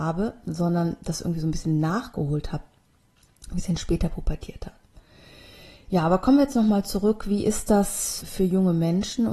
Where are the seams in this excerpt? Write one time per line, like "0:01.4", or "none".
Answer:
0:08.2